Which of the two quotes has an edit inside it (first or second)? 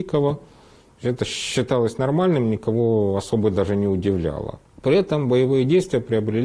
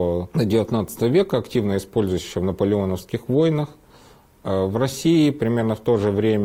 first